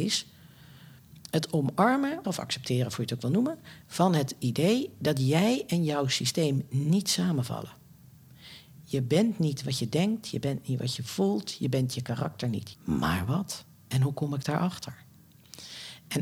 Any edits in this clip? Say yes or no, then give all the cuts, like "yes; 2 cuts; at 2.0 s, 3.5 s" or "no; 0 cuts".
yes; 2 cuts; at 2.2 s, 12.7 s